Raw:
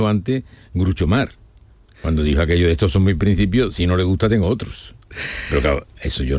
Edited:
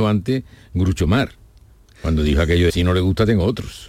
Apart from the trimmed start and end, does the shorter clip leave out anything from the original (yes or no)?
yes